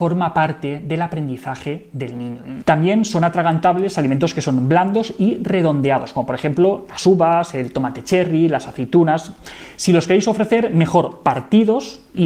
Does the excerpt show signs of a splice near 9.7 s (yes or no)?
no